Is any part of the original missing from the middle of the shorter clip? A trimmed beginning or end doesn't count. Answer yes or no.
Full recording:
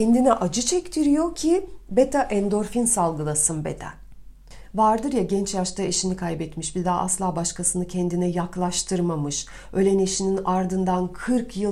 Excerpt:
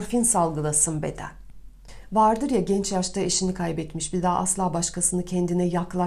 no